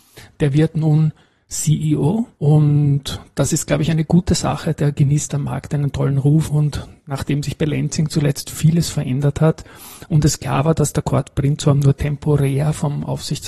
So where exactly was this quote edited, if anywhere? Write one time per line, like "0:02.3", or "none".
0:02.3